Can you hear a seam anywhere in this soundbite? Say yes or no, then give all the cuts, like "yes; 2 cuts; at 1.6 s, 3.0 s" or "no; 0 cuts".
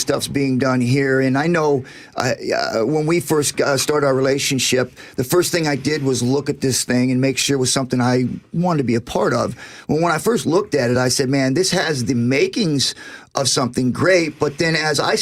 no; 0 cuts